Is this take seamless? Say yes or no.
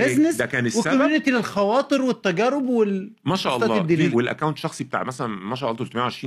no